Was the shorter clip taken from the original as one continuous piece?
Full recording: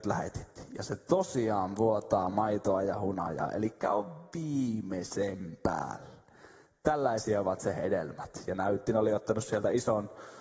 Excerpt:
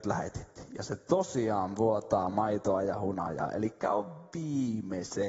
yes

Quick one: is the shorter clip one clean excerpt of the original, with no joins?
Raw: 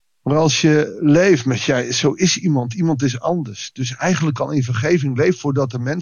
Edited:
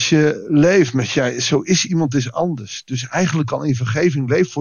no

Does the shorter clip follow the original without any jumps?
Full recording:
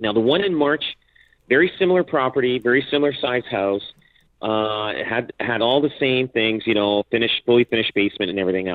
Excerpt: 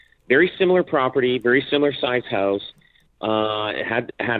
yes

